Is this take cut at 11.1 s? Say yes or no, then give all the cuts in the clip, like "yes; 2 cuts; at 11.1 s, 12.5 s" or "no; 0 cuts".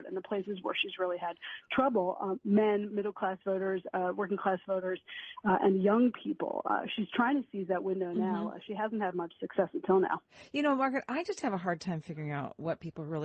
no; 0 cuts